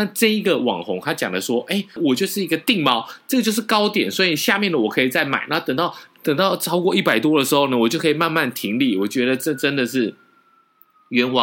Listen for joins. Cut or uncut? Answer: cut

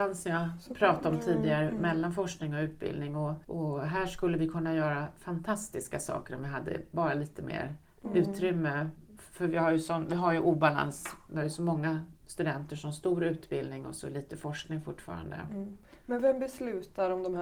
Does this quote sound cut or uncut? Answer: cut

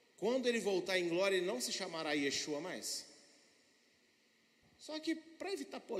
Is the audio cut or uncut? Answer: cut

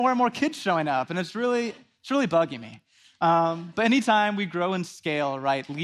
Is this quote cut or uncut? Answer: uncut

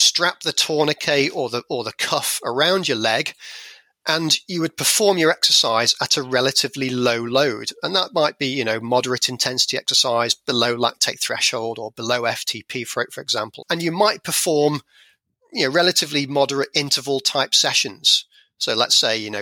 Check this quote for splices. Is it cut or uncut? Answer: cut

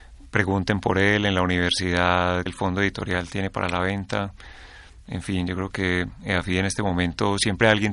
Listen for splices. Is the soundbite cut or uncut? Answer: cut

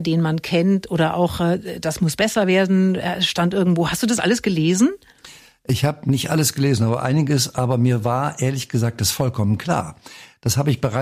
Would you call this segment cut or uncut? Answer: uncut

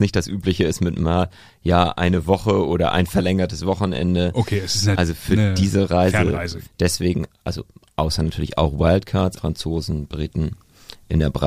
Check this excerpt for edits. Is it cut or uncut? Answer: cut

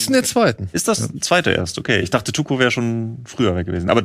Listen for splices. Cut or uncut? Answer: uncut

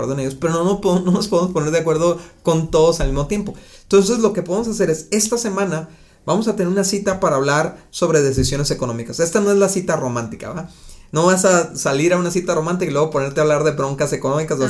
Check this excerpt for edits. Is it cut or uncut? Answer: uncut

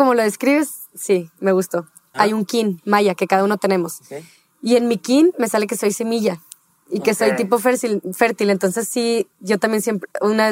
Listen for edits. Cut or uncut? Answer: cut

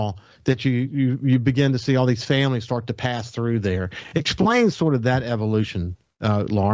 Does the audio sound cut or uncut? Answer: uncut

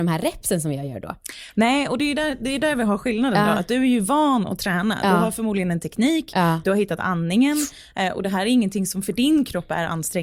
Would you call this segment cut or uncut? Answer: uncut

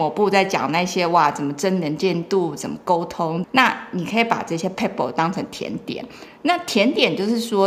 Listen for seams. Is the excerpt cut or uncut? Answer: cut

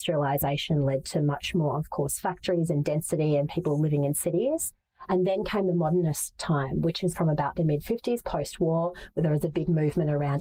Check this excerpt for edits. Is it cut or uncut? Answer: uncut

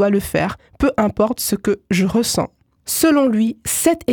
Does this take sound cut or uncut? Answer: uncut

